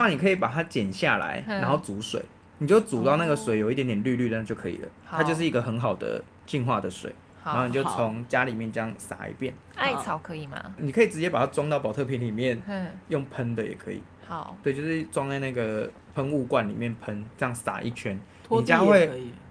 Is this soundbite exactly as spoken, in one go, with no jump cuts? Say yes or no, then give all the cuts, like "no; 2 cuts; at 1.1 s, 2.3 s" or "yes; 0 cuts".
no; 1 cut; at 10.8 s